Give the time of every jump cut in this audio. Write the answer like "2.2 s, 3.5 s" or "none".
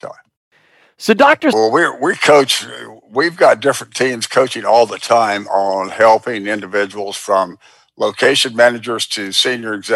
1.5 s